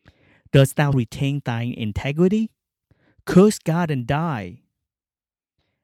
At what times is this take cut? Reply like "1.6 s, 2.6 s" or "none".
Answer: 0.9 s